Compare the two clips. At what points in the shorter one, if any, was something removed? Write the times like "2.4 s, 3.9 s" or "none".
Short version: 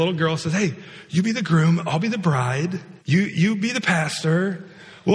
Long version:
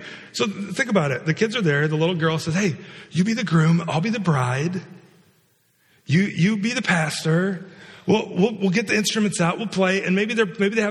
3.0 s